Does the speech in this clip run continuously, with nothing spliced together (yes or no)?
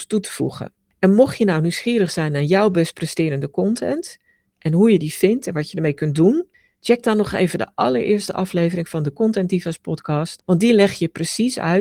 yes